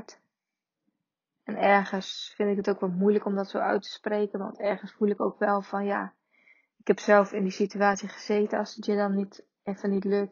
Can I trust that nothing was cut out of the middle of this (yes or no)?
yes